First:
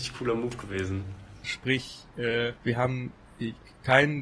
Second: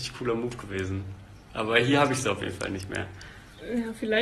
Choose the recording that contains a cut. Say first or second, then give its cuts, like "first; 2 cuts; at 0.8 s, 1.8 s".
first; 2 cuts; at 1.4 s, 2.6 s